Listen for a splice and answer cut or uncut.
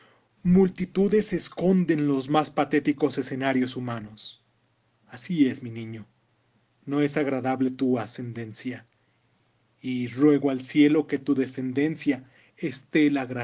uncut